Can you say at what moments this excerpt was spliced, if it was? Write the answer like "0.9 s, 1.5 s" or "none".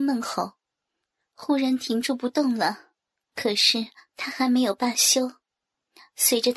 3.3 s